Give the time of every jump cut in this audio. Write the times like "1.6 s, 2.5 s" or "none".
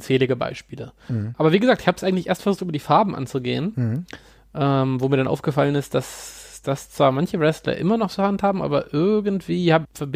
none